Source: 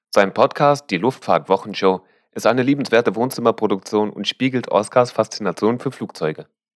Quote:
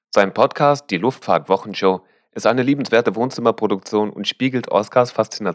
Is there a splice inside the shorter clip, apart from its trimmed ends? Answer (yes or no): no